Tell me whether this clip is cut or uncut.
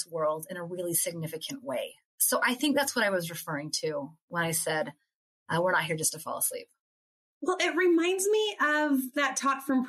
uncut